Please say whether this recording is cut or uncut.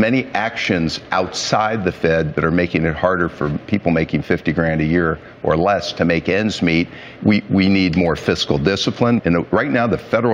cut